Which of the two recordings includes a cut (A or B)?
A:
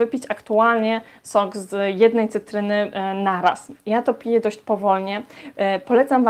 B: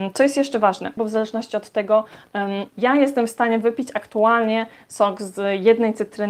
B